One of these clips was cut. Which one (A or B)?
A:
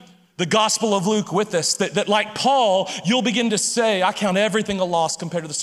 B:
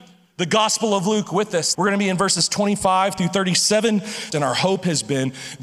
B